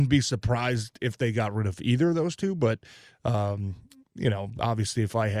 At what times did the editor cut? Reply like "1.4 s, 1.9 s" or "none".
none